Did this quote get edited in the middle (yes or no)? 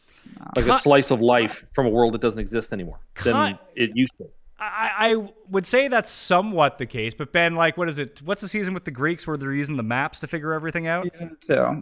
no